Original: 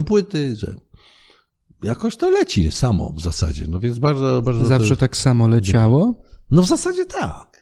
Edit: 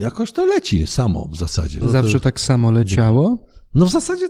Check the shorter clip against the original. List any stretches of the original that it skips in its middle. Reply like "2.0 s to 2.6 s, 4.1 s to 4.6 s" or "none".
3.7 s to 4.6 s